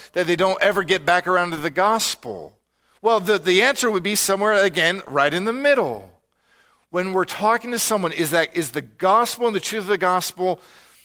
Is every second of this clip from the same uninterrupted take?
yes; 0 cuts

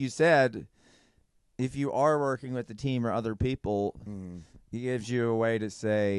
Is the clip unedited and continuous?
yes; 0 cuts

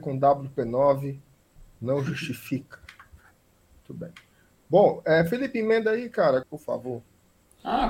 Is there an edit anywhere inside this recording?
yes; 1 cut; at 6.4 s

